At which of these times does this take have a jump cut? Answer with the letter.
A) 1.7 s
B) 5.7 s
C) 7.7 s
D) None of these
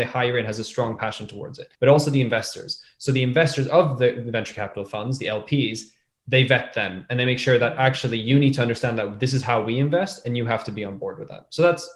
A